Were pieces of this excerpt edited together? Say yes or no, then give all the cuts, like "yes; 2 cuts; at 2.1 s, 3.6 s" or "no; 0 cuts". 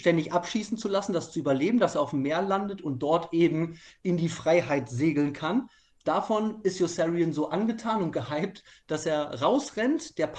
no; 0 cuts